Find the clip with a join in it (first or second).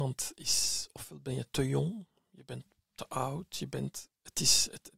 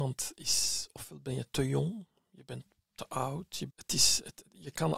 second